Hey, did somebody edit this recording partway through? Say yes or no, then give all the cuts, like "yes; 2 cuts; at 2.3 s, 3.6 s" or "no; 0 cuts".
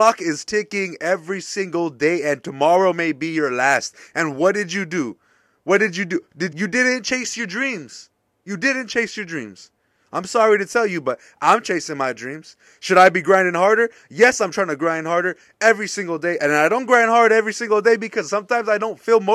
yes; 1 cut; at 6.5 s